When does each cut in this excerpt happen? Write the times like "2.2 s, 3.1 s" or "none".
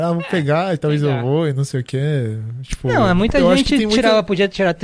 none